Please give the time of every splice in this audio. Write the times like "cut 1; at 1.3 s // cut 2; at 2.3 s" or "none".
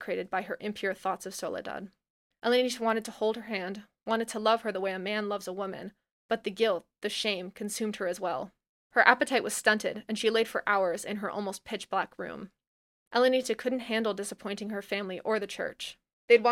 none